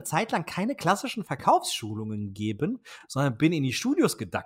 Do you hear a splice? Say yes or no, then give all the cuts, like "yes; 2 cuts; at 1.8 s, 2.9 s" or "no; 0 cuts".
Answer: no; 0 cuts